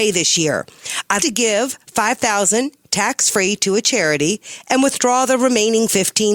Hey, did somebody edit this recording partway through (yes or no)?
yes